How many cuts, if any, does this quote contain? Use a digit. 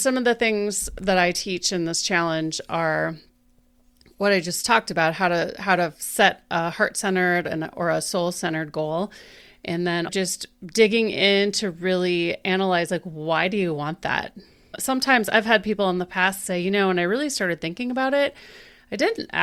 1